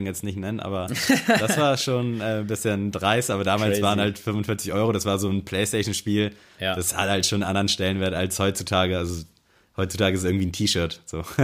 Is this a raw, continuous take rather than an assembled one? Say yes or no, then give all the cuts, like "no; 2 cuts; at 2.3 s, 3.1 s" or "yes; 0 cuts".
yes; 0 cuts